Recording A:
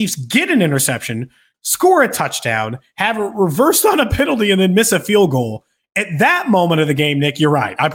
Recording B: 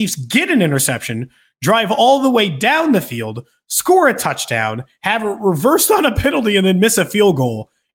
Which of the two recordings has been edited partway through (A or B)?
A